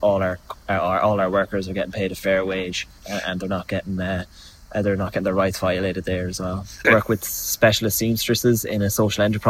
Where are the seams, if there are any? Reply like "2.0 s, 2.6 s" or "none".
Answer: 3.0 s, 6.8 s